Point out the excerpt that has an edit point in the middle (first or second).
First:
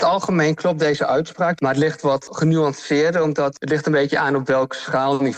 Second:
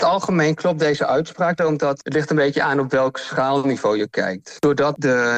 second